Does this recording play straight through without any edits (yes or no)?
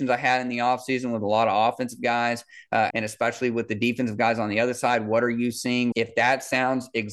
no